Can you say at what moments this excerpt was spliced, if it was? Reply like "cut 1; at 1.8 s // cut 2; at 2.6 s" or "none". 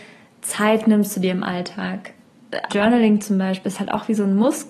cut 1; at 2.7 s